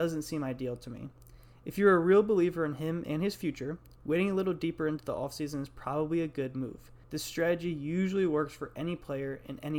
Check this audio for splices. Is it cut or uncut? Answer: cut